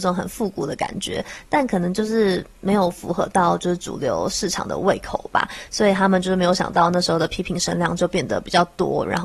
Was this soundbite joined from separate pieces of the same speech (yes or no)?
no